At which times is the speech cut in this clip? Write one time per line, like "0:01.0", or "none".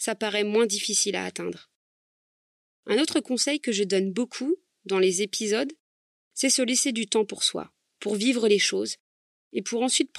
none